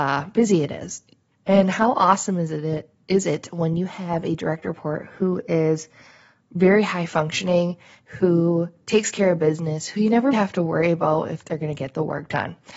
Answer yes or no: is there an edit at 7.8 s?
no